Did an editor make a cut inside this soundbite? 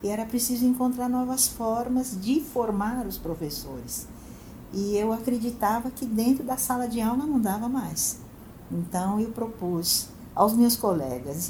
no; 0 cuts

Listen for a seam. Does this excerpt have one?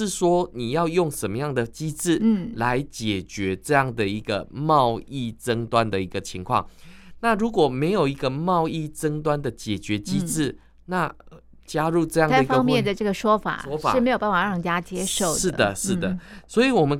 no; 0 cuts

